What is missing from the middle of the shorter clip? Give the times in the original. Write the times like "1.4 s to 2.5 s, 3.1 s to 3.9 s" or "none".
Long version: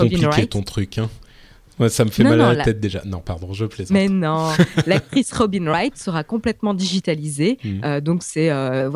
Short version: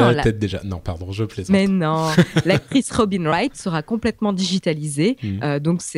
none